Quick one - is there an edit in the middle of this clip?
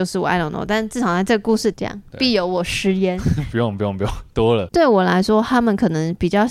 yes; 2 cuts; at 1.7 s, 4.7 s

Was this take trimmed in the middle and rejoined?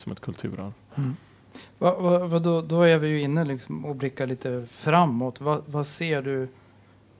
no; 0 cuts

